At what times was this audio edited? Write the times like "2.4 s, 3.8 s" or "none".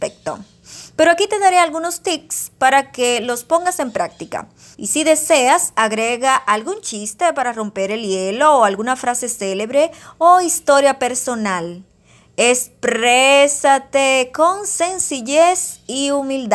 4.7 s